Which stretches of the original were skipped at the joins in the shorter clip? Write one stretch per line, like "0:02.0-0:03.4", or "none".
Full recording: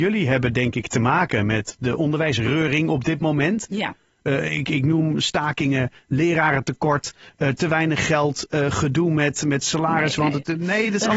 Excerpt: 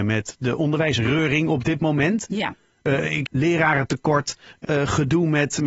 0:04.7-0:06.0
0:07.4-0:08.5